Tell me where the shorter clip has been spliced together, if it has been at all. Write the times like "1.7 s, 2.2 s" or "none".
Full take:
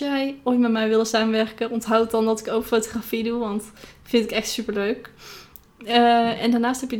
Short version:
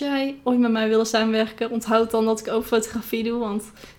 none